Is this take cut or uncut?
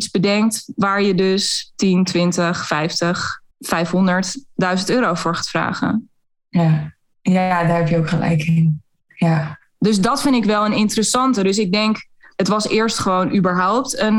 cut